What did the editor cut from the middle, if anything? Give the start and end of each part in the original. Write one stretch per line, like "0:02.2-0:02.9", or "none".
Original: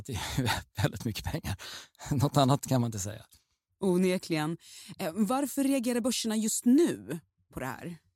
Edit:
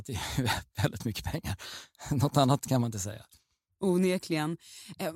none

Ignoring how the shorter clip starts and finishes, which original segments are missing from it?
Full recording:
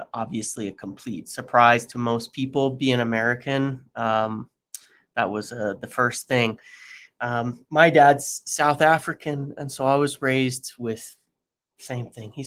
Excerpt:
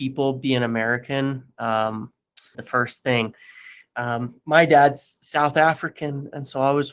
0:04.9-0:05.8

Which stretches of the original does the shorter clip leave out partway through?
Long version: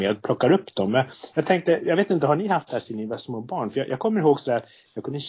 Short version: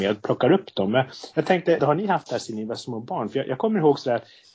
0:01.8-0:02.2

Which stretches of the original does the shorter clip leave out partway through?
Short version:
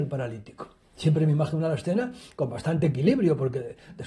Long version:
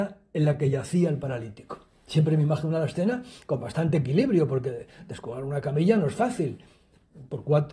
none

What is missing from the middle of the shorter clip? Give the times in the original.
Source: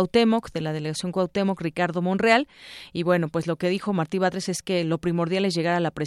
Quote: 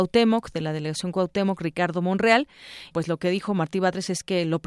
0:02.9-0:03.3

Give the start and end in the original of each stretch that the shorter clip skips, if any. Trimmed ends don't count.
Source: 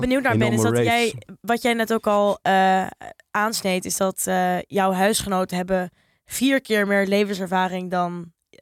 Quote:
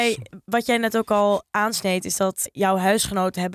0:02.4-0:03.2
0:04.3-0:04.6

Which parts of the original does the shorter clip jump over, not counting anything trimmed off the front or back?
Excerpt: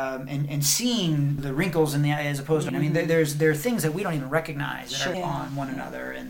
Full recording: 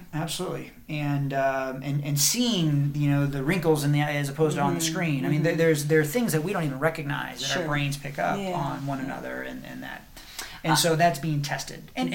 0:02.9-0:03.3
0:04.6-0:05.2
0:07.6-0:08.4

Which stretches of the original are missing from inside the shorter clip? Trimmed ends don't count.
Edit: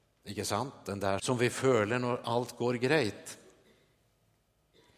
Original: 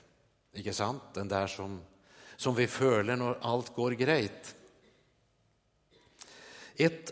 0:01.5-0:02.4

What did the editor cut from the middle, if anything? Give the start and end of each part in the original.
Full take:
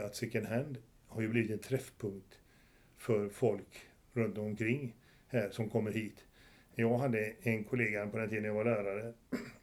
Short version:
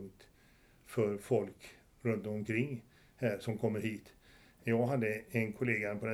none

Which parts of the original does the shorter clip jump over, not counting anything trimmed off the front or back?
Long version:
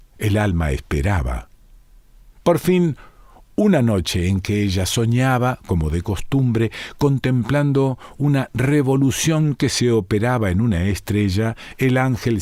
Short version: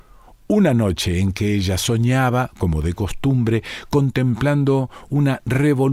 none

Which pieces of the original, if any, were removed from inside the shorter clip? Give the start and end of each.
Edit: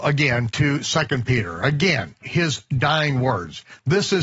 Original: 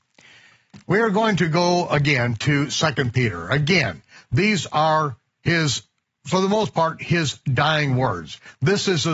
0:04.1-0:07.0

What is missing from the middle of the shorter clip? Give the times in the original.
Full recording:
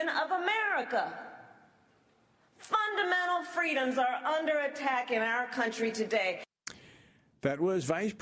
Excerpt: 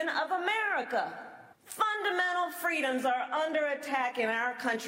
0:01.5-0:02.5

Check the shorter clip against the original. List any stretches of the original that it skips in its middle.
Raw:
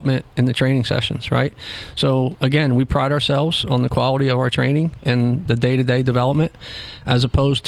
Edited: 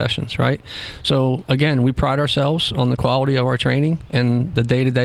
none

